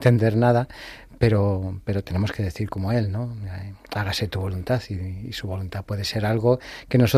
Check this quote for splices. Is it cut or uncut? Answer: uncut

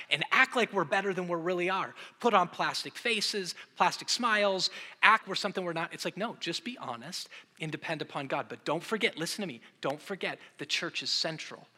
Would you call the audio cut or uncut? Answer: cut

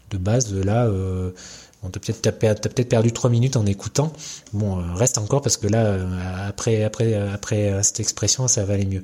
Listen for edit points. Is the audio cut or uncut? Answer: uncut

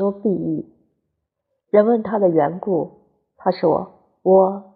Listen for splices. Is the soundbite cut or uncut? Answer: cut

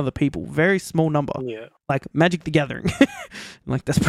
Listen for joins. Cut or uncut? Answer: uncut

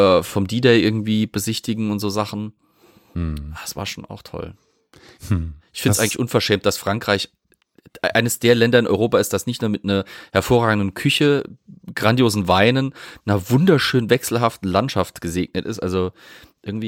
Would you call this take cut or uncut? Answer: uncut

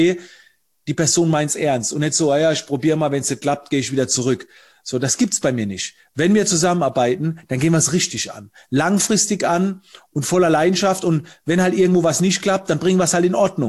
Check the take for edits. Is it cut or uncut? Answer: uncut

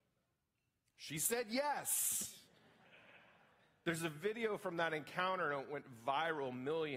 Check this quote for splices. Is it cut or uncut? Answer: uncut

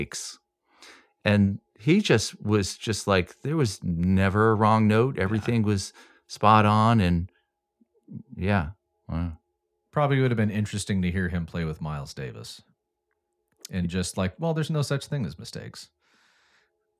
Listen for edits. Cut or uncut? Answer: uncut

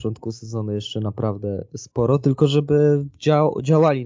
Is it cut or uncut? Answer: uncut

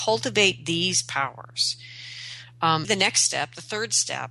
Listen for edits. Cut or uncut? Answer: cut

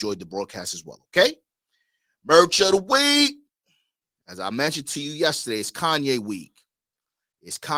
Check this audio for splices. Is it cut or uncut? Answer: uncut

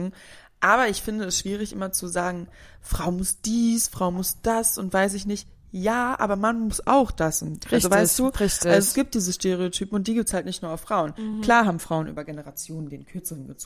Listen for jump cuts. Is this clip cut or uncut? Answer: uncut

